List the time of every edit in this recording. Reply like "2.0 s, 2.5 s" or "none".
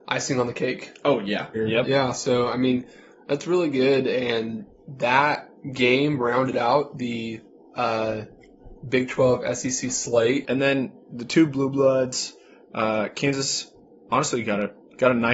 1.5 s, 10.4 s